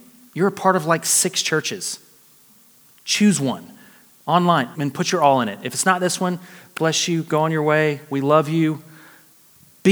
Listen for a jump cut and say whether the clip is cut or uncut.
cut